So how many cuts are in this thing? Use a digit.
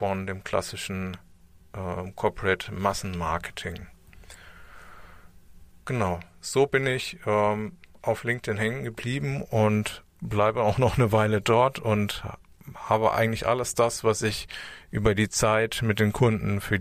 0